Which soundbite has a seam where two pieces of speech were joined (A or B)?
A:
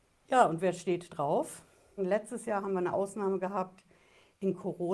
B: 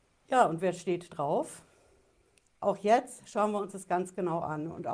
A